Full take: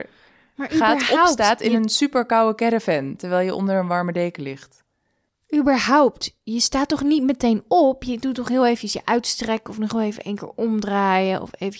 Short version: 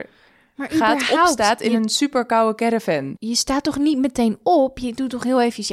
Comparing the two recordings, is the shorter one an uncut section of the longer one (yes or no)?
no